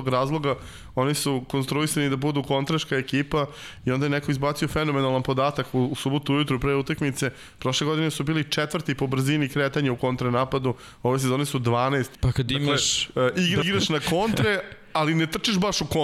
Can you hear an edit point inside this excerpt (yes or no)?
yes